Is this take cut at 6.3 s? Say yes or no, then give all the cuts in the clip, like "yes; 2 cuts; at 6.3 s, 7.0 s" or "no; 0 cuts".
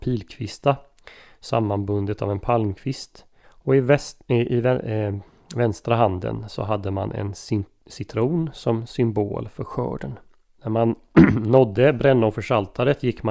no; 2 cuts; at 3.4 s, 10.6 s